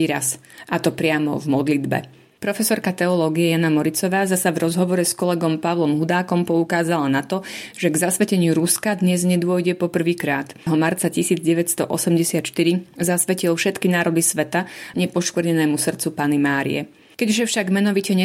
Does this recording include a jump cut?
yes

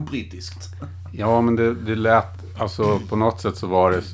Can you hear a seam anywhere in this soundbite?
no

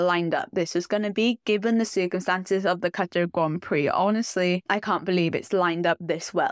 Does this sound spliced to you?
no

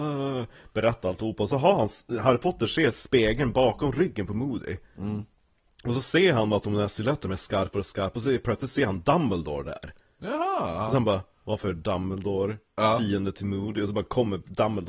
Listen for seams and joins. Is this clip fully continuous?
yes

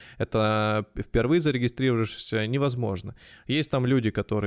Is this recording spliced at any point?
no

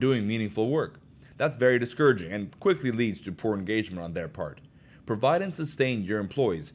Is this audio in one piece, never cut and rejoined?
yes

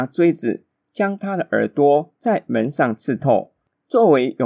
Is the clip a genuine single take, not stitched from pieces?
yes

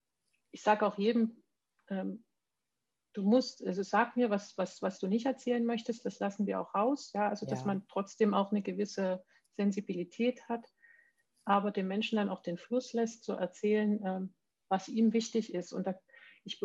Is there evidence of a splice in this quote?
no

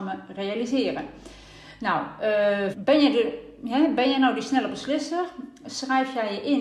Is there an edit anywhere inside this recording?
yes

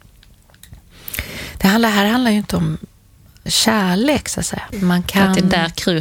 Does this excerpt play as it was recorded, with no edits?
no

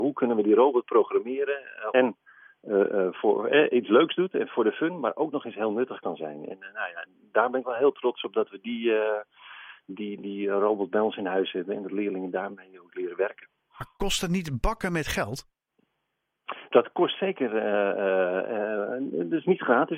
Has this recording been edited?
yes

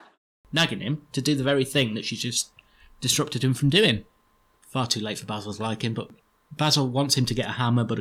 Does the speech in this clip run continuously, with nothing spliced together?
no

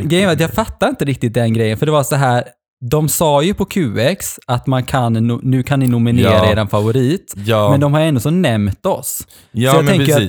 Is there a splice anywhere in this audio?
no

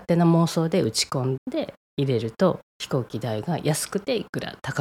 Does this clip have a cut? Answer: yes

